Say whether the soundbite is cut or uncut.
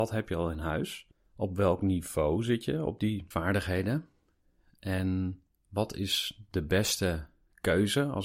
uncut